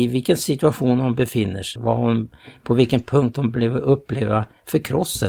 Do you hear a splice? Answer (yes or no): yes